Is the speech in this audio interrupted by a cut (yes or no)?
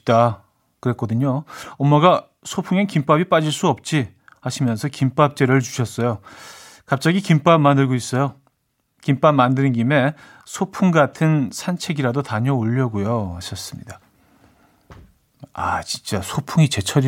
no